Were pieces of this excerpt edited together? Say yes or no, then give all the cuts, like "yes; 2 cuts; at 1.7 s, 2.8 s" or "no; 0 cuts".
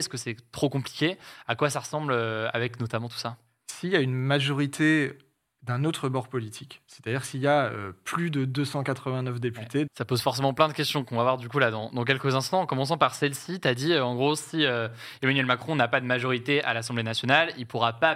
yes; 1 cut; at 9.9 s